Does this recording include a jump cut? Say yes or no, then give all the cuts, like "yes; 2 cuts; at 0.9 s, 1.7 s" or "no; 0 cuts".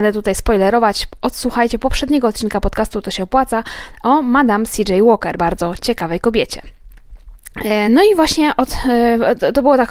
yes; 2 cuts; at 5.4 s, 7.9 s